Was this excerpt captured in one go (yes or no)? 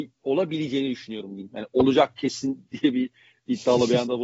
yes